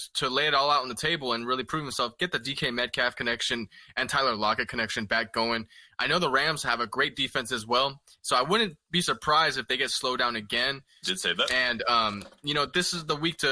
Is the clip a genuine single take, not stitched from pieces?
no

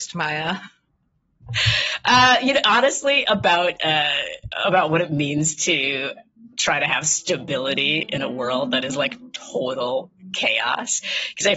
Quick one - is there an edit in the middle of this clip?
no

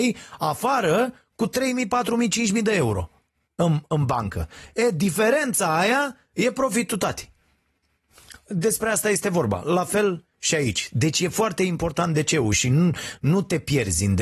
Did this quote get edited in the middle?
no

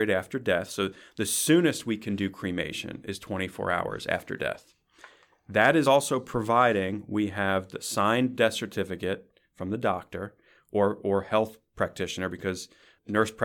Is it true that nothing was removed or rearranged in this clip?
yes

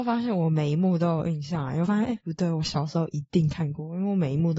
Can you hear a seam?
no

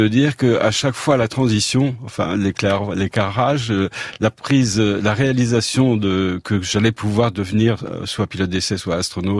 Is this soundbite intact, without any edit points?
yes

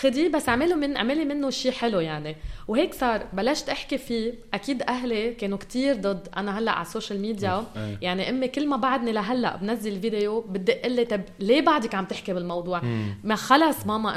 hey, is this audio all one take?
no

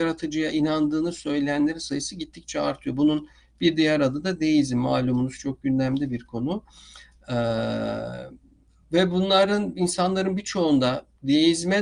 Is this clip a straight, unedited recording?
yes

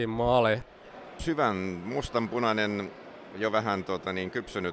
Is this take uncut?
yes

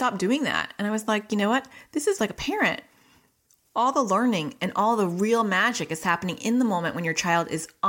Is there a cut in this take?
yes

